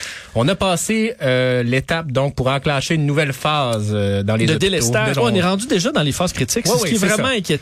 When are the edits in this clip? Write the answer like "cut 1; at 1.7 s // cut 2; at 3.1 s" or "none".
cut 1; at 5.1 s